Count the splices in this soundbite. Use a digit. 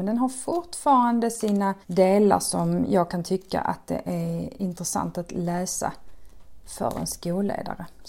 1